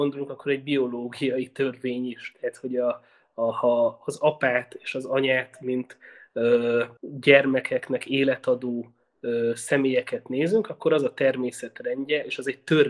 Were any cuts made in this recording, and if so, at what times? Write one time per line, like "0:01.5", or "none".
0:07.0

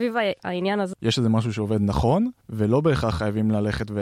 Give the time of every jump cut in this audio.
0:00.9

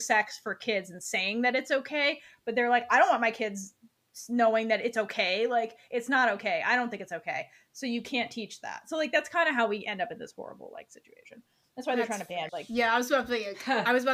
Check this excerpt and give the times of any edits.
0:12.5

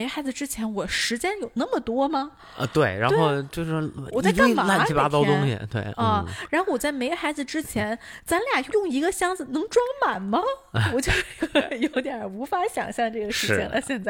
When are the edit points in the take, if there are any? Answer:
0:08.7

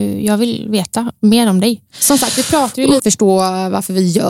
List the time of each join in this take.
0:01.9
0:03.0

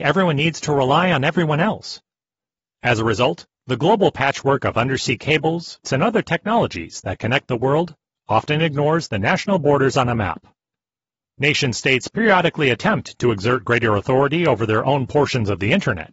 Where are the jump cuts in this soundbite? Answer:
0:05.8
0:11.2

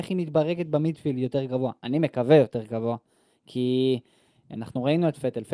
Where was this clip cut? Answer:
none

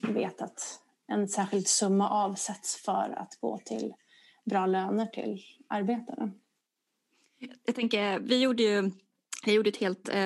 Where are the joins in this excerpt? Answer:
none

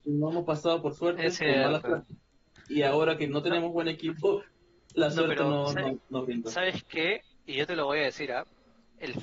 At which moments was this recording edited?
0:07.3

